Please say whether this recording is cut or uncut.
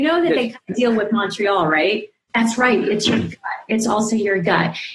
cut